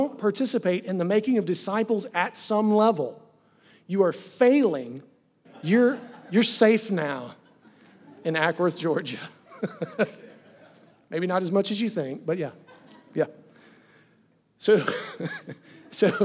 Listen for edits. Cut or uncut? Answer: cut